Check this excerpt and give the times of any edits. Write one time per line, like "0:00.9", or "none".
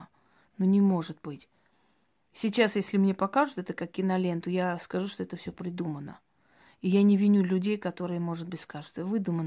none